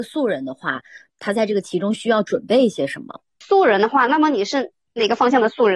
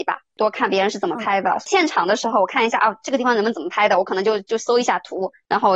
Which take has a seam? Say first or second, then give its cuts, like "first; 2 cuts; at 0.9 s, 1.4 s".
first; 1 cut; at 3.4 s